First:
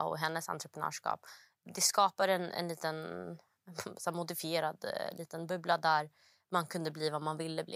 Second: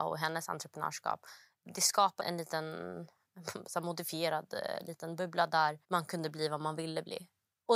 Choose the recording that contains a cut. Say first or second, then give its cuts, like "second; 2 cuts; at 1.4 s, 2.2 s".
second; 2 cuts; at 2.2 s, 5.8 s